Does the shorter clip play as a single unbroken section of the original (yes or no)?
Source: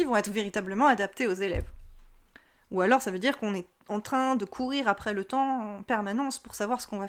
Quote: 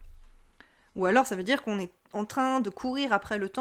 yes